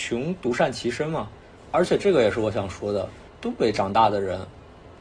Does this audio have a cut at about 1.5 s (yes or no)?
no